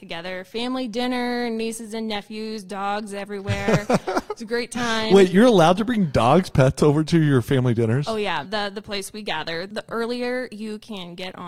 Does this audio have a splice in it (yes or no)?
yes